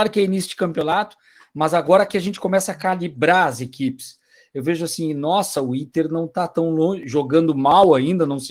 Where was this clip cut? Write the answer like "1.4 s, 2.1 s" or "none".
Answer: none

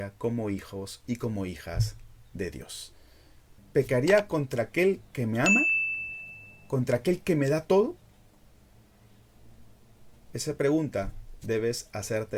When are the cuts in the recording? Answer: 3.6 s

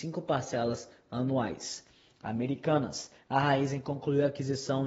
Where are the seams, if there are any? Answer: 3.2 s

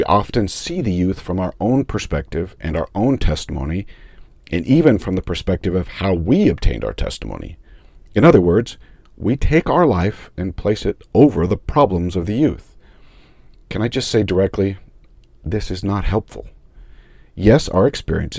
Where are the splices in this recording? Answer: none

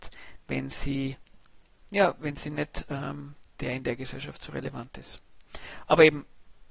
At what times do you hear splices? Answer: 3.5 s

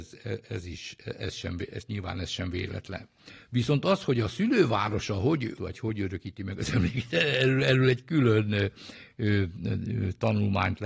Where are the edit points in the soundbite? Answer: 5.6 s

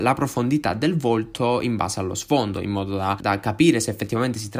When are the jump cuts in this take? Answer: 3.2 s

